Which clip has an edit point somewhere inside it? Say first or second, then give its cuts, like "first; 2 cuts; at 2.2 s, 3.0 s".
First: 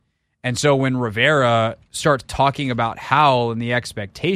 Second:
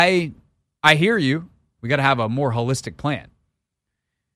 second; 1 cut; at 1.8 s